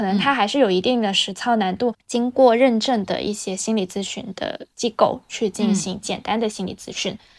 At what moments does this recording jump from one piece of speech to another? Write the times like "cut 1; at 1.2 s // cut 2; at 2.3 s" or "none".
cut 1; at 1.9 s // cut 2; at 4.7 s